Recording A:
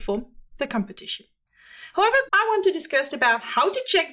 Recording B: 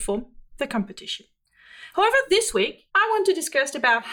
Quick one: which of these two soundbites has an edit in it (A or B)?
A